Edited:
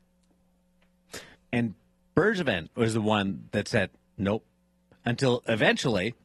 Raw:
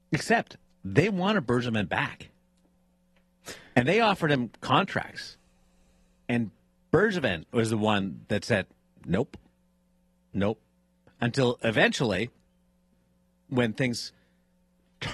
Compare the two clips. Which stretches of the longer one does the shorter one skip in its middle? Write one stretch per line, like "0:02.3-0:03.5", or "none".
0:03.7-0:06.1
0:08.9-0:10.3